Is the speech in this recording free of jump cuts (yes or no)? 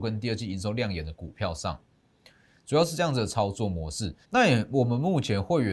no